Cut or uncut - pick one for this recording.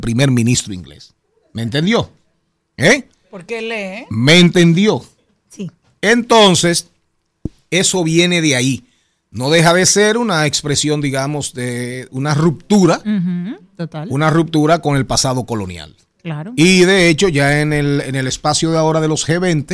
uncut